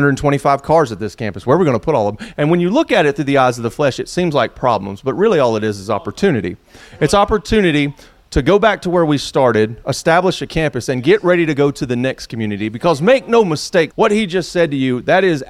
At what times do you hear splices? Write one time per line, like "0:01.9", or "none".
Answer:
0:13.9

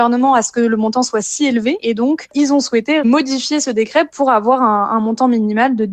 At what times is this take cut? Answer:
0:01.8

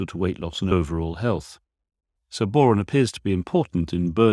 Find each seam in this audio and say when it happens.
0:02.2

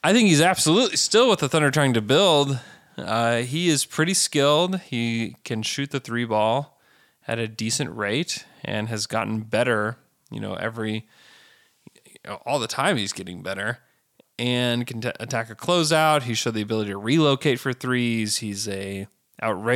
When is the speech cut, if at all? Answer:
none

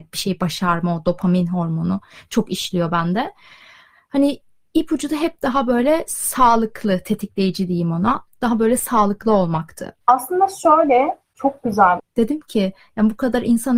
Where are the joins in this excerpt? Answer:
0:10.0
0:12.0

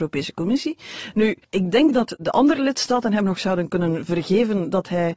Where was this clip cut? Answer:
0:01.4

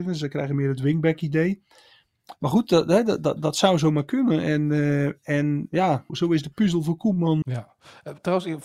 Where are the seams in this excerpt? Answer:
0:06.1
0:07.4

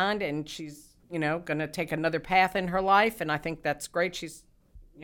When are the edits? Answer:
0:01.0

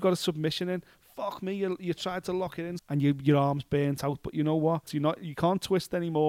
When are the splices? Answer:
0:02.8
0:04.9

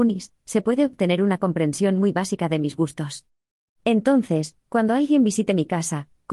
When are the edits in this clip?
0:03.7

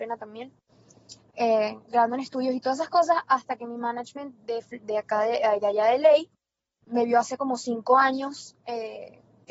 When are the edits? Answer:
0:06.8

